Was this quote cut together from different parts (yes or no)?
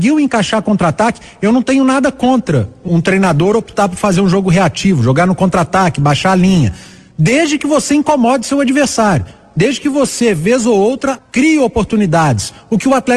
yes